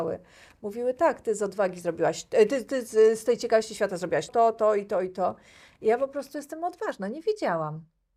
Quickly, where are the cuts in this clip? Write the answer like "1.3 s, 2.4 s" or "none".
4.3 s